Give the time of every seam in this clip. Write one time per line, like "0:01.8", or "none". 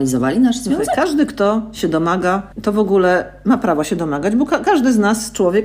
0:02.5